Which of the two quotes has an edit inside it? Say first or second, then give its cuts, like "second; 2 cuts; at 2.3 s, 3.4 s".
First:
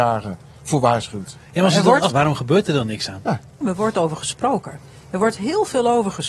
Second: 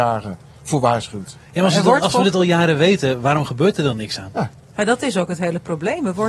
first; 2 cuts; at 2.1 s, 3.6 s